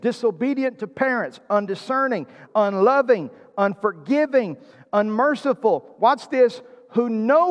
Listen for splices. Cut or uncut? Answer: cut